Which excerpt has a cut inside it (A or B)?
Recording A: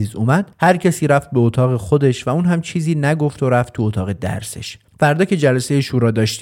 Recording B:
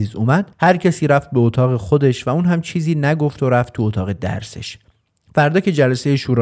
A